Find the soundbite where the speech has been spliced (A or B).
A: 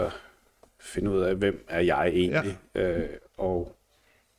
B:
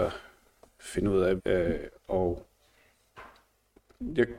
B